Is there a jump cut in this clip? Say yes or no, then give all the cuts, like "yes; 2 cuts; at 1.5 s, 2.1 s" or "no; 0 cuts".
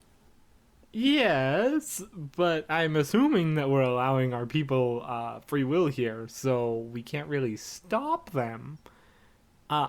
no; 0 cuts